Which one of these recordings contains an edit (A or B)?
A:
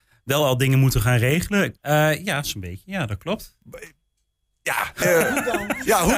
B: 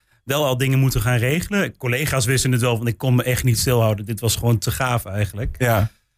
A